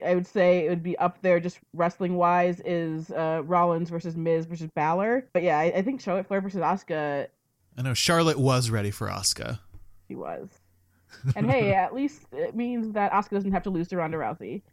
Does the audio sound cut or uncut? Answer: cut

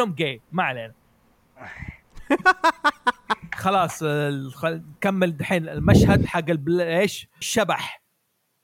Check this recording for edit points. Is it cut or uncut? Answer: cut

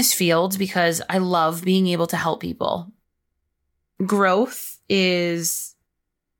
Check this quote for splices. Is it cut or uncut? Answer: cut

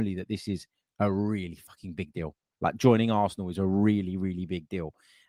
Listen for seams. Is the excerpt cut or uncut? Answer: uncut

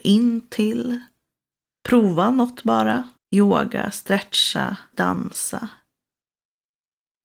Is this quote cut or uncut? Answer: cut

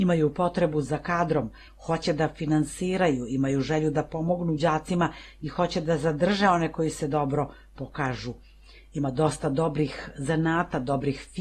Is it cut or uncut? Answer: uncut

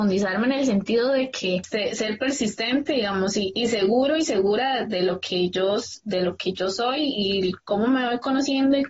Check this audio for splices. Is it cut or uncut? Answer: uncut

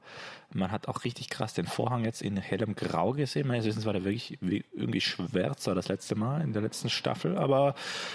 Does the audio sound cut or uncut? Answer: uncut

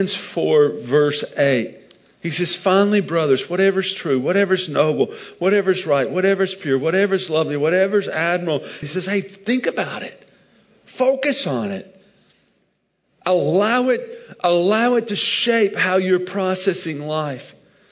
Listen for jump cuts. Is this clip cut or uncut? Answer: cut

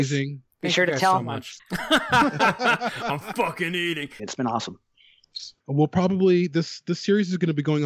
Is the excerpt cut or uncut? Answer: cut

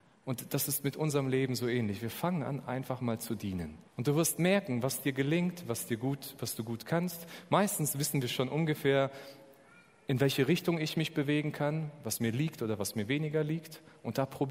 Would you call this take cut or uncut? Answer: cut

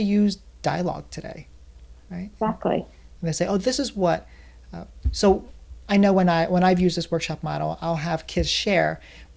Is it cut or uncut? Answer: cut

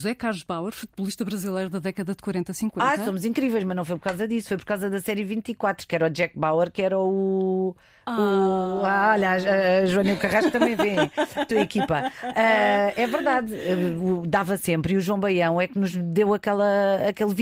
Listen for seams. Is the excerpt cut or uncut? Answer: uncut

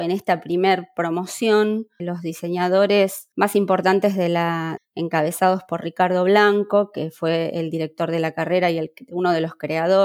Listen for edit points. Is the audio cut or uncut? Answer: cut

